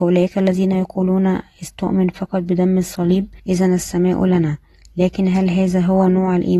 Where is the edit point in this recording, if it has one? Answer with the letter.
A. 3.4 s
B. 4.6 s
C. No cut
A